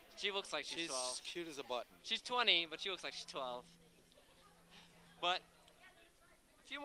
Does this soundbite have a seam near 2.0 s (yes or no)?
yes